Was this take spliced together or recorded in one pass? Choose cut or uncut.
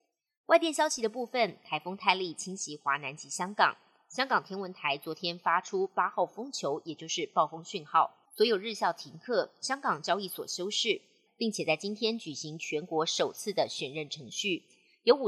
cut